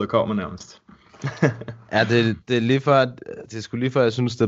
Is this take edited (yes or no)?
no